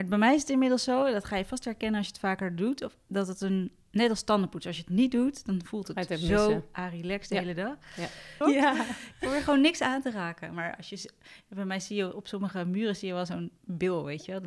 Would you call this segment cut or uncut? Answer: cut